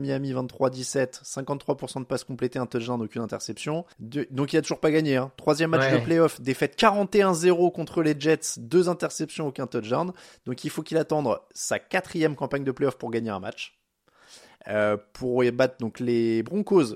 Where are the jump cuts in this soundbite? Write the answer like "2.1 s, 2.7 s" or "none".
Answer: 3.9 s